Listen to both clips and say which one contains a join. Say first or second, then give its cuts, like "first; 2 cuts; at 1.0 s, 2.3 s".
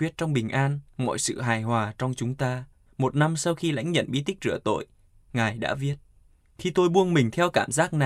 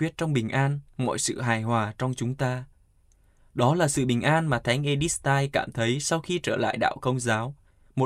first; 1 cut; at 2.9 s